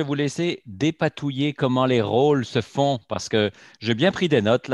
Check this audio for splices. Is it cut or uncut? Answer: uncut